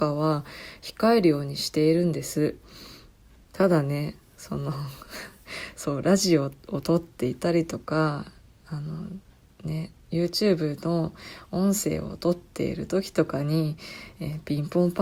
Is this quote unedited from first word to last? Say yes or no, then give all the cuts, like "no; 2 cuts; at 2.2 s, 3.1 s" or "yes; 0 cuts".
yes; 0 cuts